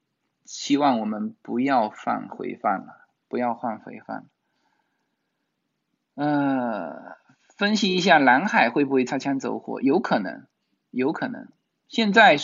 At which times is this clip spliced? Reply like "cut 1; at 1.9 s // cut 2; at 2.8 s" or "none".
none